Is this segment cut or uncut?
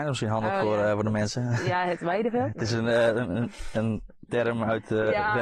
uncut